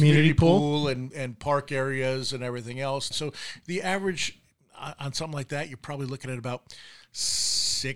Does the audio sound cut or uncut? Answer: cut